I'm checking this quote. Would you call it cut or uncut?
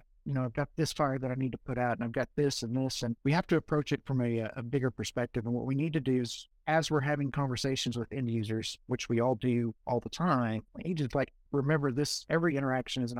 cut